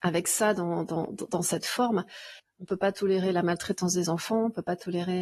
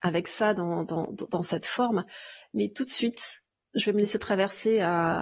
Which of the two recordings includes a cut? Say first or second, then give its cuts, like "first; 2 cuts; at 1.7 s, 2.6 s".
first; 1 cut; at 2.4 s